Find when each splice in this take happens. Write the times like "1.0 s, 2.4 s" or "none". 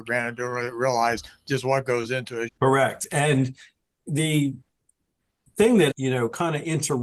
2.5 s, 5.9 s